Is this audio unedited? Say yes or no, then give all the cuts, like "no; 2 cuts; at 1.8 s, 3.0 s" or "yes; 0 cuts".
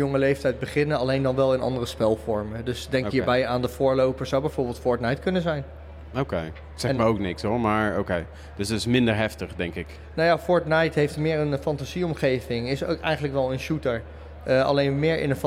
yes; 0 cuts